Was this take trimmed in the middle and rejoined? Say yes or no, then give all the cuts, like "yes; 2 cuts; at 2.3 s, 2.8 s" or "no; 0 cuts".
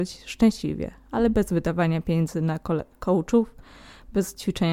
no; 0 cuts